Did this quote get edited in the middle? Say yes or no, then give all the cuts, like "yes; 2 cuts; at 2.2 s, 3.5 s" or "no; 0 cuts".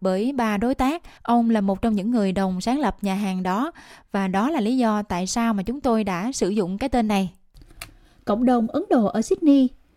yes; 1 cut; at 1.2 s